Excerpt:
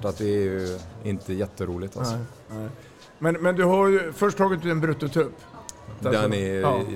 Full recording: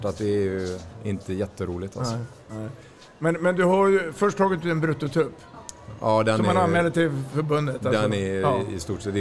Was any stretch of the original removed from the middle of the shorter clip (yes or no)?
yes